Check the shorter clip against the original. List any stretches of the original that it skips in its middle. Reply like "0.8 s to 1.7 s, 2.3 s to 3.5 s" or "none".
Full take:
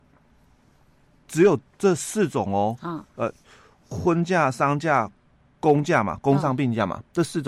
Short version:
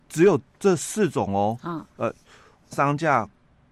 3.9 s to 4.5 s